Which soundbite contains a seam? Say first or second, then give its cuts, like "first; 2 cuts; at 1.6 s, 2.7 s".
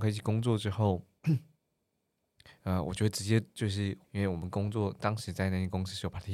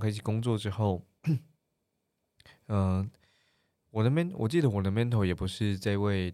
first; 2 cuts; at 2.6 s, 4.0 s